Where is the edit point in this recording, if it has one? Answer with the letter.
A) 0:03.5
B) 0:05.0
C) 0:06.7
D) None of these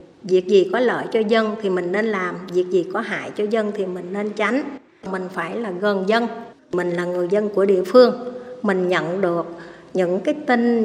D